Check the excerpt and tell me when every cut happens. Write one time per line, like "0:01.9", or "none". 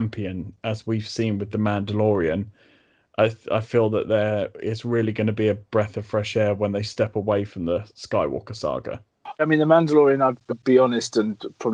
0:09.4
0:10.5